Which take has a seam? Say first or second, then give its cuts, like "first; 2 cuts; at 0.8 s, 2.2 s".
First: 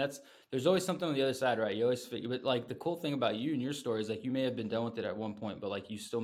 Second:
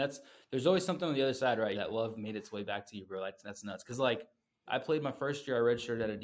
second; 2 cuts; at 1.7 s, 4.7 s